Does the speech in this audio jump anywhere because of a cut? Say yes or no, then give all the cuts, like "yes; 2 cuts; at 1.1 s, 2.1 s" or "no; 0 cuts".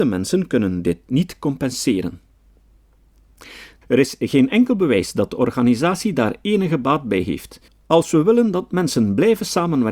yes; 2 cuts; at 3.8 s, 7.7 s